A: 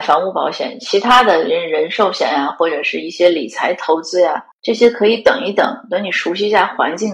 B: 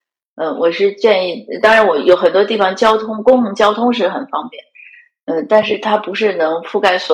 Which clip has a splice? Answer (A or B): A